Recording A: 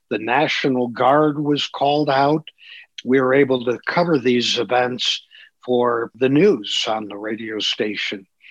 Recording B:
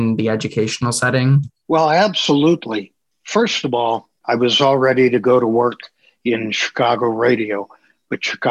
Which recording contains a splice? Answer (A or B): B